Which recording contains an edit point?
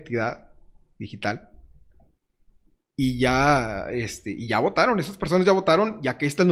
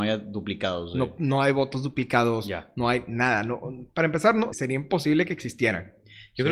second; 1 cut; at 4.5 s

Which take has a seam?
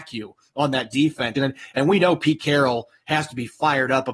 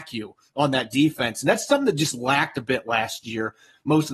first; 1 cut; at 1.4 s

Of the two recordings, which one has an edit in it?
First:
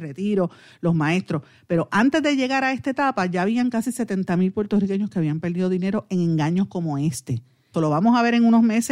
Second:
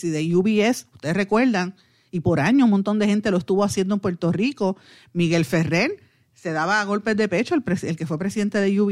first; 1 cut; at 7.7 s

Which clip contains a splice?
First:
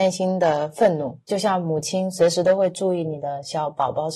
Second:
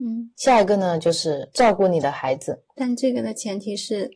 second; 1 cut; at 2.7 s

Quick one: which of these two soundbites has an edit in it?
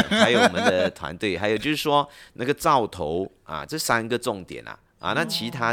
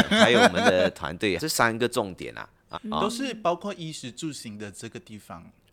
second; 2 cuts; at 1.4 s, 2.7 s

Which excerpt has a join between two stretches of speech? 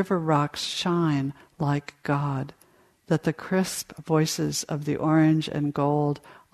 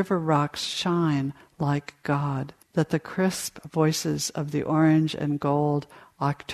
second; 1 cut; at 2.6 s

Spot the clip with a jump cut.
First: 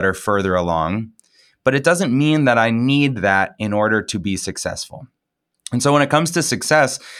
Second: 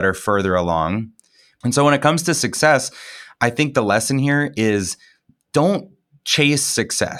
second; 1 cut; at 1.6 s

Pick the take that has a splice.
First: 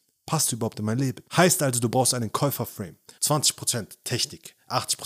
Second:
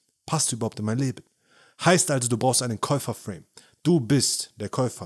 first; 2 cuts; at 1.3 s, 3.2 s

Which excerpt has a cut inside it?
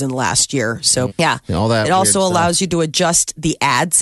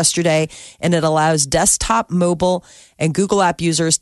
first; 1 cut; at 1.1 s

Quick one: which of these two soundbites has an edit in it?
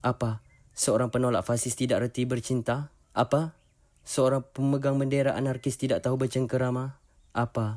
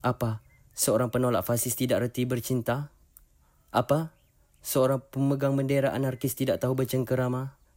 first; 1 cut; at 3.0 s

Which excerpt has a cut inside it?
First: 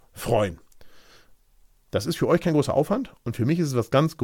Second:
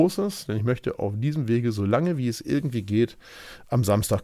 first; 1 cut; at 1.9 s

